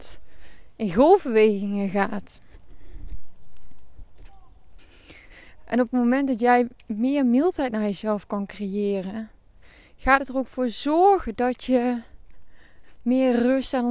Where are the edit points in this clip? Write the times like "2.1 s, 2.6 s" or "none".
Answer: none